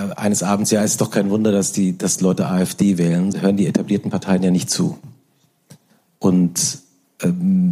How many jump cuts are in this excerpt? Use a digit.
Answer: 1